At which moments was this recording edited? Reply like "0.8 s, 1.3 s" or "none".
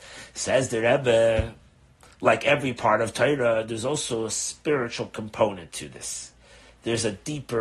none